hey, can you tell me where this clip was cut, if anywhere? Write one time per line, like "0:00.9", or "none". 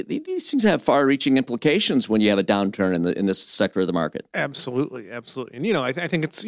none